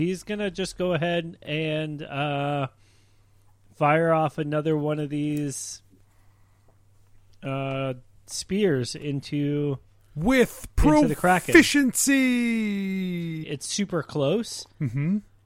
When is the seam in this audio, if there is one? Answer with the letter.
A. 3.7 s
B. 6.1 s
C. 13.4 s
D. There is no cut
C